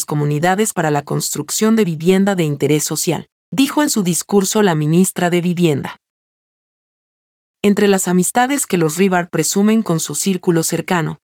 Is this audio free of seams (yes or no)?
yes